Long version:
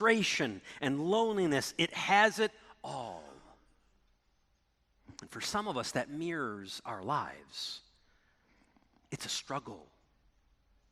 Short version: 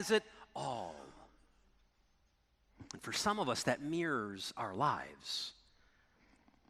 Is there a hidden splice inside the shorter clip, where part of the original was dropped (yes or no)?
no